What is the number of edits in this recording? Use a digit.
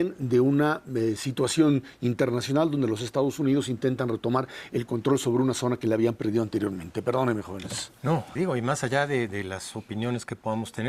1